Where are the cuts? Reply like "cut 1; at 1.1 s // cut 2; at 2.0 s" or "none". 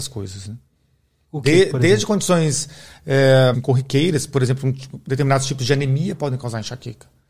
cut 1; at 3.5 s